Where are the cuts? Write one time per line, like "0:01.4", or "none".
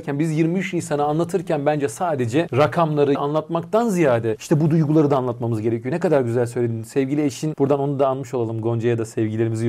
none